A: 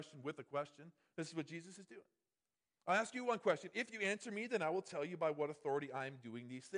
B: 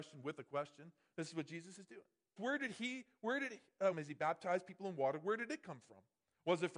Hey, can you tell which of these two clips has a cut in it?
B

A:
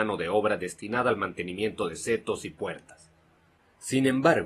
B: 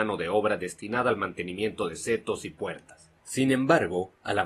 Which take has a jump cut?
B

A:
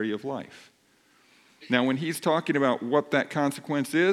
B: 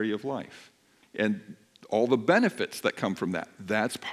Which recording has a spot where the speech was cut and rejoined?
B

